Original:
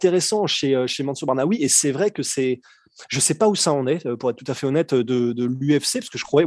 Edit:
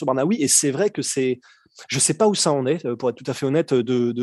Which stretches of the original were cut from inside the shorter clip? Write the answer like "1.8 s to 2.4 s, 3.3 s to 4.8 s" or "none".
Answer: none

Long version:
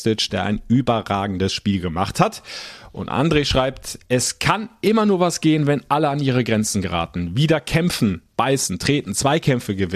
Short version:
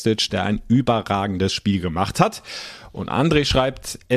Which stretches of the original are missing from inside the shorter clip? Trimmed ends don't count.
none

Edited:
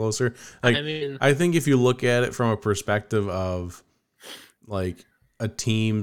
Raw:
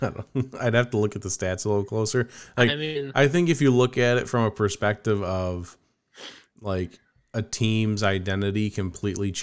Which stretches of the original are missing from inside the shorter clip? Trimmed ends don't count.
none

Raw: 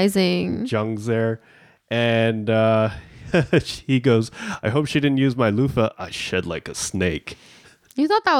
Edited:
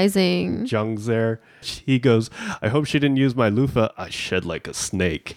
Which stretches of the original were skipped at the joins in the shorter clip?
1.6 s to 3.6 s

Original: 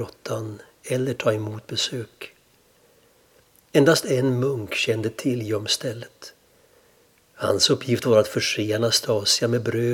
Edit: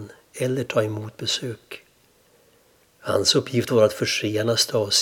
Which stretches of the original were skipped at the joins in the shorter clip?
3.3 s to 7.2 s

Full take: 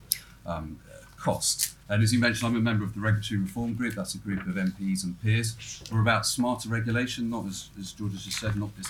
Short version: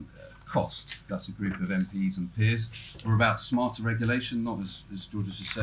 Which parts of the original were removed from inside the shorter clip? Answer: 1.8 s to 4.0 s

